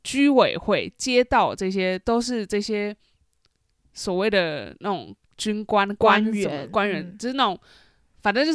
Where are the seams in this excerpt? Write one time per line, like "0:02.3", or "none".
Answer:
0:00.9